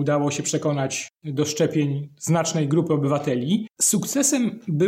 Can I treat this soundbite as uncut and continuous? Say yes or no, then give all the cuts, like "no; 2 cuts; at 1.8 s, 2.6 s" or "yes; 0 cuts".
no; 1 cut; at 3.7 s